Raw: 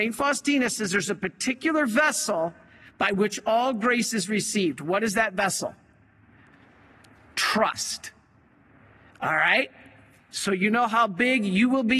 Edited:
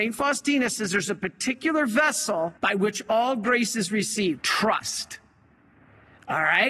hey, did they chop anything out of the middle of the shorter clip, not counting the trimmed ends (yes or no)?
yes